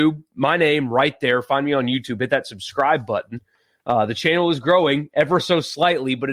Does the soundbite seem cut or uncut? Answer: uncut